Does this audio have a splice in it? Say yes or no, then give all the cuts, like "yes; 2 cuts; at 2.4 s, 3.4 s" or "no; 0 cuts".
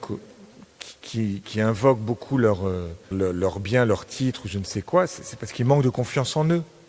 yes; 1 cut; at 3.1 s